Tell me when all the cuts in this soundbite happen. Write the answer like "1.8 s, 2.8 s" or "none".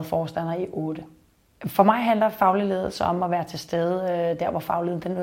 none